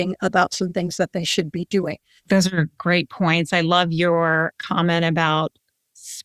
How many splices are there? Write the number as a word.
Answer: one